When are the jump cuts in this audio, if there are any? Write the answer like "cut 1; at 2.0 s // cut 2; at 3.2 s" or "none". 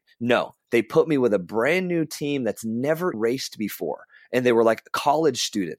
cut 1; at 3.1 s